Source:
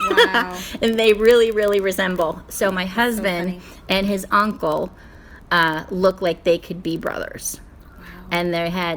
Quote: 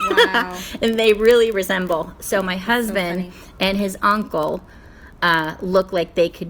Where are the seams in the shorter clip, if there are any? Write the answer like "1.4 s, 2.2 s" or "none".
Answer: 1.5 s